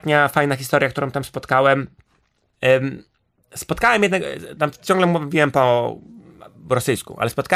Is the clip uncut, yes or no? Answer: no